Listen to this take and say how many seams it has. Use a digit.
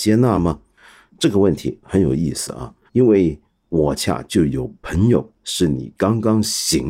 2